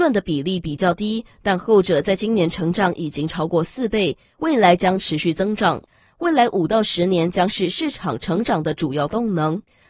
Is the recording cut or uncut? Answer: cut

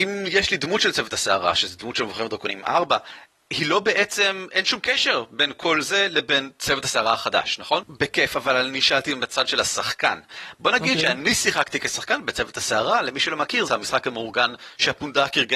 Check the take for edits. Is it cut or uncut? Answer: cut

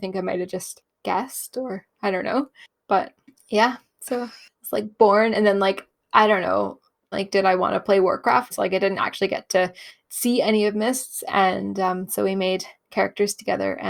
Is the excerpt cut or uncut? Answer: cut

